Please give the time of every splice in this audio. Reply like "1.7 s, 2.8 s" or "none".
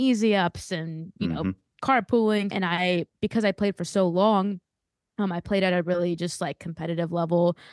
2.5 s